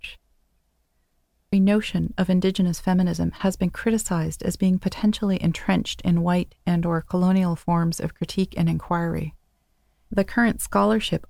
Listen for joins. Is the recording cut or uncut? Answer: cut